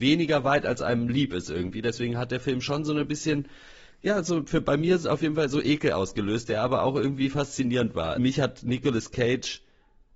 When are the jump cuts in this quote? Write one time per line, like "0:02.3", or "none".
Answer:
0:08.2

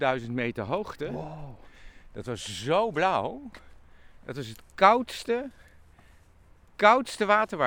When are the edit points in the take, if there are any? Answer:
none

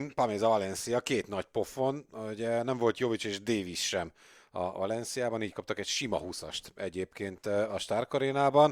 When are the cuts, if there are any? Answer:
none

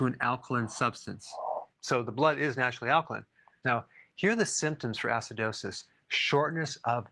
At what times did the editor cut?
0:01.7
0:03.6

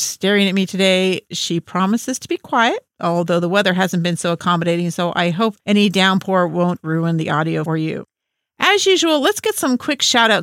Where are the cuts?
none

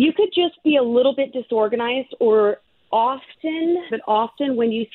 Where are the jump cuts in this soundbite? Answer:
0:03.9

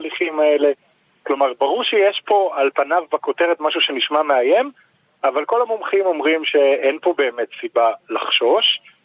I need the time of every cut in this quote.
none

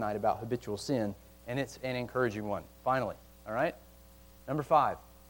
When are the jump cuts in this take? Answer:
none

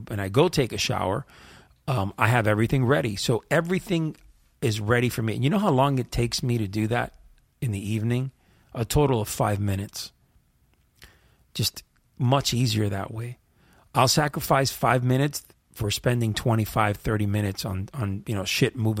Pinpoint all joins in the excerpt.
none

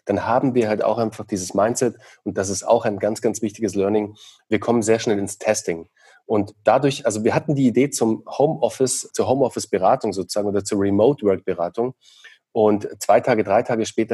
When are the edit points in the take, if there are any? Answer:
0:09.1

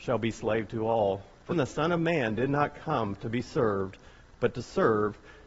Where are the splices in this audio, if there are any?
0:01.5

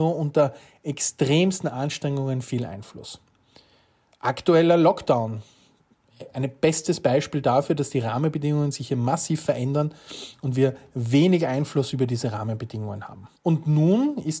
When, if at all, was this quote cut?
0:13.4

